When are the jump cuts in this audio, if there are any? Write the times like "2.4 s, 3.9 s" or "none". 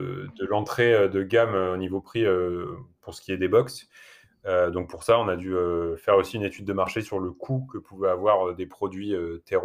none